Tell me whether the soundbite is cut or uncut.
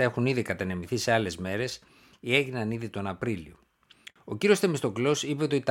uncut